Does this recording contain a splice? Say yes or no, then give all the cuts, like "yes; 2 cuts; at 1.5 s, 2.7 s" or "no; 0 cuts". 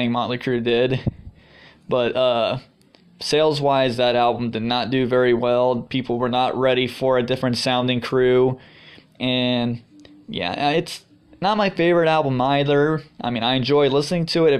no; 0 cuts